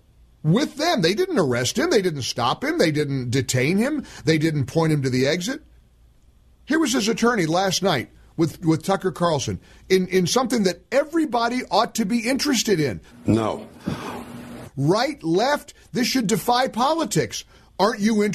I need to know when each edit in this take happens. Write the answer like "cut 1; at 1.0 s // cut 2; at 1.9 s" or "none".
cut 1; at 13.1 s // cut 2; at 14.6 s